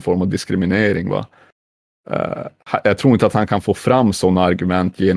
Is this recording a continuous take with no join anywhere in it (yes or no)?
yes